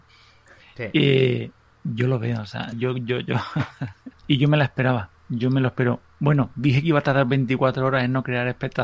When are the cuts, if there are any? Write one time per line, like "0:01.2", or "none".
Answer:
0:02.7
0:04.1